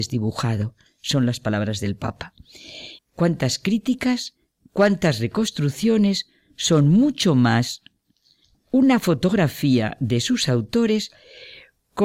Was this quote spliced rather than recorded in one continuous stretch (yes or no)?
yes